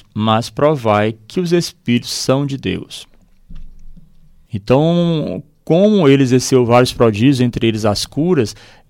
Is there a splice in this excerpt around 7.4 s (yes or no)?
no